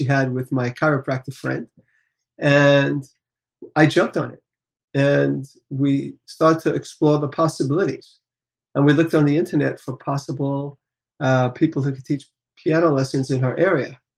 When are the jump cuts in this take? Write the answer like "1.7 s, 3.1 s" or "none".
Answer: none